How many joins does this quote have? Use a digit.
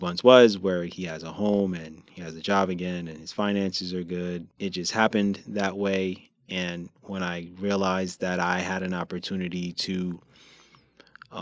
1